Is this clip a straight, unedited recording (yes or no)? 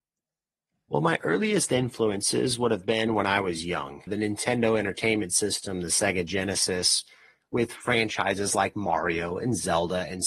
no